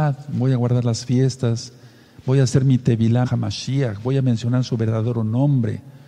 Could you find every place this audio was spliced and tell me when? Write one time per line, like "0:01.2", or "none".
0:03.2